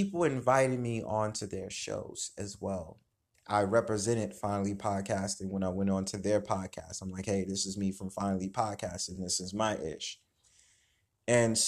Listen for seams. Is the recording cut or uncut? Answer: uncut